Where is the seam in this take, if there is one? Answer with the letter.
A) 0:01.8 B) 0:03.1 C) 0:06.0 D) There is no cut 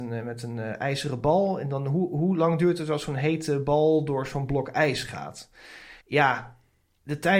C